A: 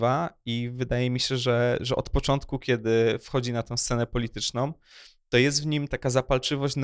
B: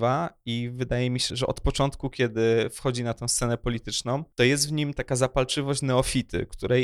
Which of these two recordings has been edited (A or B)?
B